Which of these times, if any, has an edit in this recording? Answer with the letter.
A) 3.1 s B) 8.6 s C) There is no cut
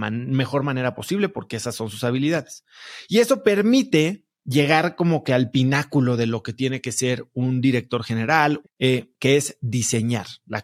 B